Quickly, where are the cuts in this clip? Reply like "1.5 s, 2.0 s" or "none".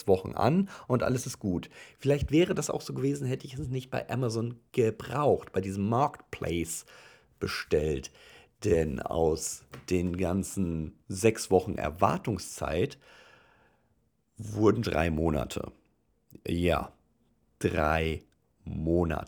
14.8 s